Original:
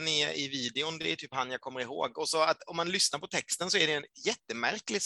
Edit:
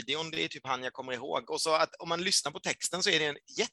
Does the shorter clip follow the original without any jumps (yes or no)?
yes